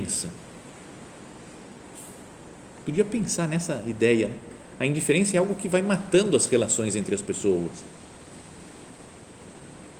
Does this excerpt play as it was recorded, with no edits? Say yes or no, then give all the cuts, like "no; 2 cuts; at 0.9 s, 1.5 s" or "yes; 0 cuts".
yes; 0 cuts